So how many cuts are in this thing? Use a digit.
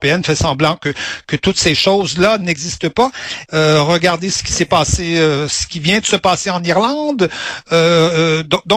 1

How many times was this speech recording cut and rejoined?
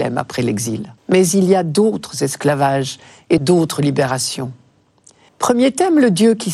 3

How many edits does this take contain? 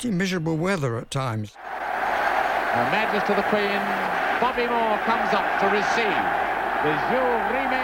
0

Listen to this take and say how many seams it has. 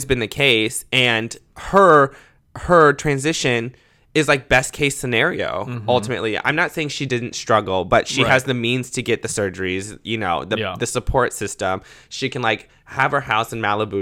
0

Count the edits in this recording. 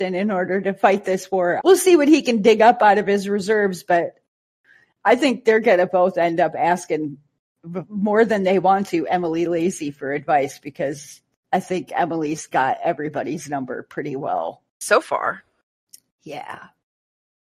2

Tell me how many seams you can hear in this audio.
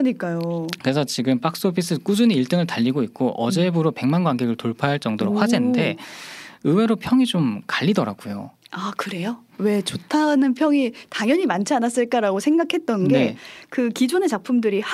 0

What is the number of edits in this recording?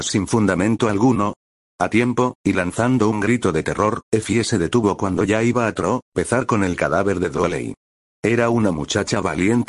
1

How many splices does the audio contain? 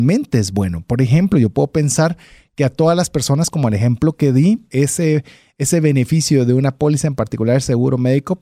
1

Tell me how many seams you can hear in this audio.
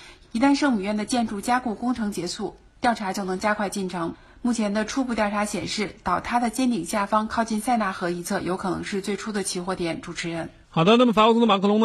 0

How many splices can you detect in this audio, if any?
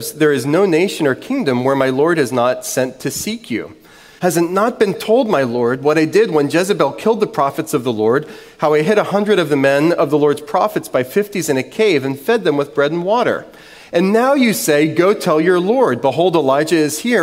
1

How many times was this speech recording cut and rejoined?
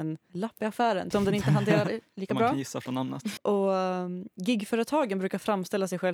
2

